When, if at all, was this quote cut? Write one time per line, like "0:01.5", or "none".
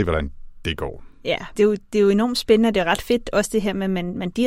0:01.6